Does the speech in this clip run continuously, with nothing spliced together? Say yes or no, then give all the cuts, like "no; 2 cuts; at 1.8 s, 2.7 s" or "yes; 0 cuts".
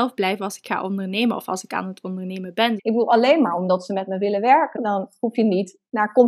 no; 2 cuts; at 2.8 s, 4.8 s